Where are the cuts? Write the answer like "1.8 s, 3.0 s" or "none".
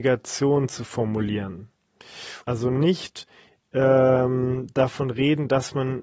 2.4 s